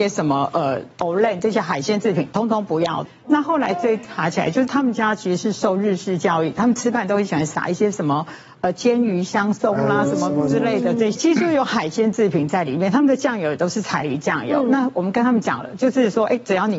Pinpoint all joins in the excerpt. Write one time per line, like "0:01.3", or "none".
0:03.2